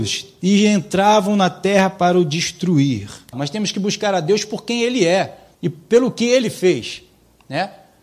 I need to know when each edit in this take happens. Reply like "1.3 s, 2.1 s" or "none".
3.3 s, 5.5 s